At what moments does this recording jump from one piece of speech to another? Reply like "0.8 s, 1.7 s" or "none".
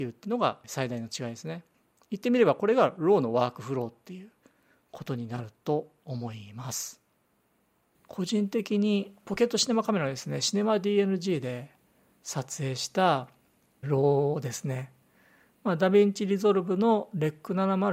13.8 s